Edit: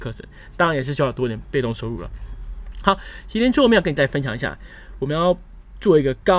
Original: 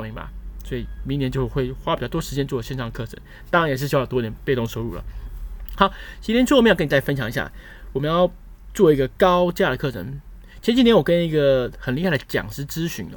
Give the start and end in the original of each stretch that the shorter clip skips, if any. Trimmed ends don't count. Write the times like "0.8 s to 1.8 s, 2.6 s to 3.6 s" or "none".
none